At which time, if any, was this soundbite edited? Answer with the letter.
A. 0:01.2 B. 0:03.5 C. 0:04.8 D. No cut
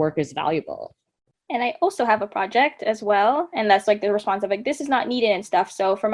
B